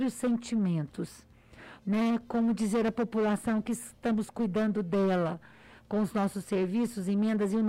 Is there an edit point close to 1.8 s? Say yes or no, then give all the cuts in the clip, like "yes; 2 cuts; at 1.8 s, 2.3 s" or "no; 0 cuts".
yes; 1 cut; at 1.8 s